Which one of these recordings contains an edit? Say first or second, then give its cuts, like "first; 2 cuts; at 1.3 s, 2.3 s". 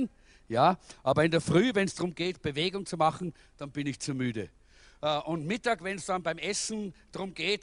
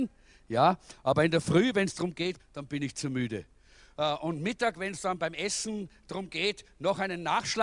second; 1 cut; at 2.4 s